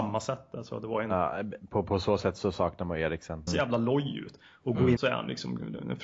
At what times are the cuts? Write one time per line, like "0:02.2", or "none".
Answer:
0:03.5
0:05.0